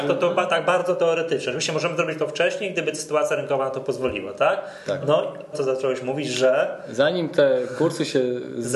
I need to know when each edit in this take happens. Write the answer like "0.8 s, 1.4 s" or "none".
5.5 s